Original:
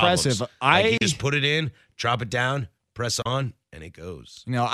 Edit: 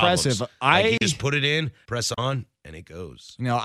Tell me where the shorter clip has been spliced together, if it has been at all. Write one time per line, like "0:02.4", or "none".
0:01.9